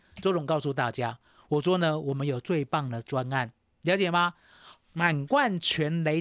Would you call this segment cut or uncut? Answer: uncut